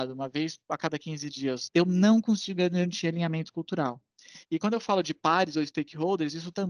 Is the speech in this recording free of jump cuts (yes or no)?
no